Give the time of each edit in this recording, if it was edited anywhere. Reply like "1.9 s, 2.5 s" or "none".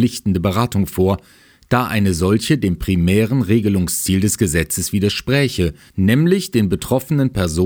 5.9 s